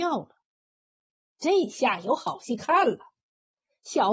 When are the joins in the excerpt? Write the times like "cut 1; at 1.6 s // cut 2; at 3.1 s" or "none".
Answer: cut 1; at 1.3 s